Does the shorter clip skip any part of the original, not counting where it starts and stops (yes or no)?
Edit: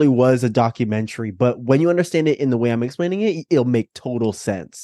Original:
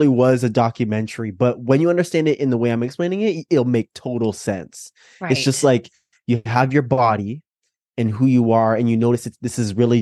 no